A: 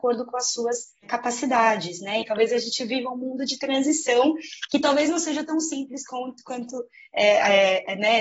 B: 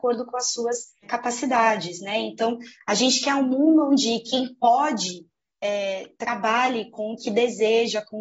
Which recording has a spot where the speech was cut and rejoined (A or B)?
A